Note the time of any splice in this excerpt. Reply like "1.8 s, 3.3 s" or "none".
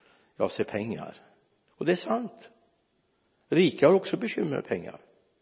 1.7 s